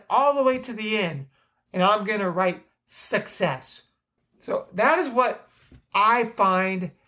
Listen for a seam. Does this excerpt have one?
yes; 1 cut; at 4.2 s

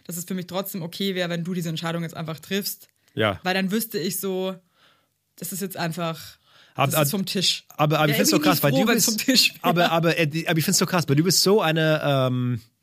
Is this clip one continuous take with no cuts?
yes; 0 cuts

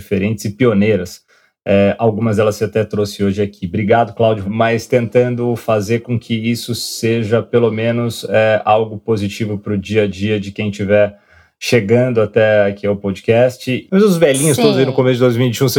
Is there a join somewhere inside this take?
yes; 2 cuts; at 4.4 s, 13.9 s

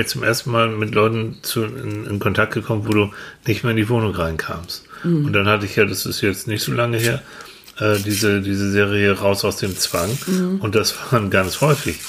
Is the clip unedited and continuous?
yes; 0 cuts

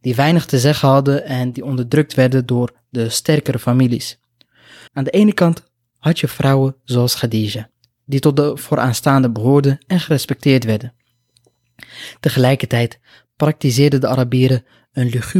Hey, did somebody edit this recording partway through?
yes; 1 cut; at 4.9 s

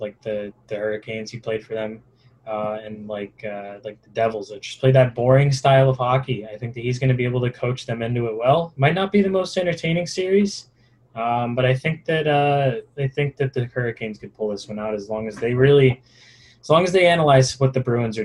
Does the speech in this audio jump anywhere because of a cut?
no; 0 cuts

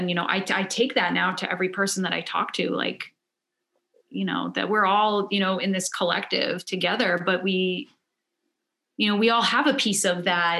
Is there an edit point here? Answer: no; 0 cuts

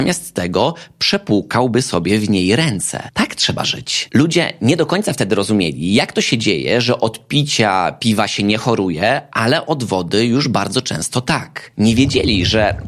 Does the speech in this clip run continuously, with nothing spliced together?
yes; 0 cuts

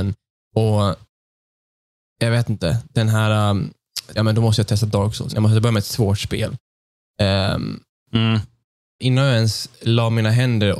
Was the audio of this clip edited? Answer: yes; 3 cuts; at 4.2 s, 5.3 s, 9.0 s

